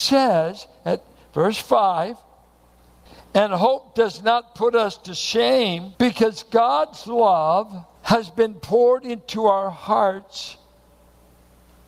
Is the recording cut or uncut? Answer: cut